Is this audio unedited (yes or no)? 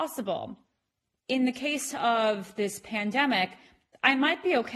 no